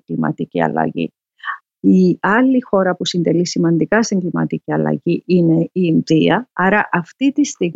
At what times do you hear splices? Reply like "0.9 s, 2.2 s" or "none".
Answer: 1.6 s, 6.5 s